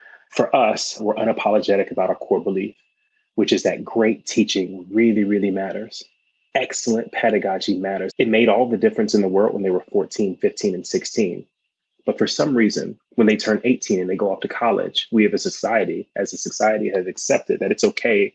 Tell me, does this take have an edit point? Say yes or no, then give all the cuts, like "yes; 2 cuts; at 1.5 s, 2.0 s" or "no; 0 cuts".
yes; 2 cuts; at 8.1 s, 13.0 s